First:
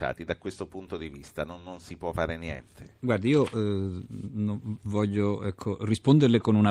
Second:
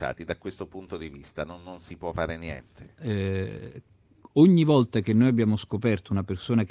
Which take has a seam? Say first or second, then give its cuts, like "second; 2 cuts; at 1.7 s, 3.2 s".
second; 1 cut; at 3.0 s